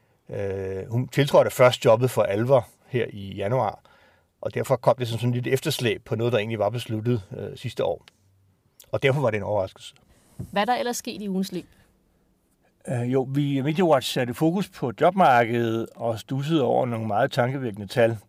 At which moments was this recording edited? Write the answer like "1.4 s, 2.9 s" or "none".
none